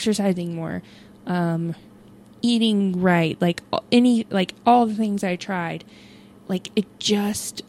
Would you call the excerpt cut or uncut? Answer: uncut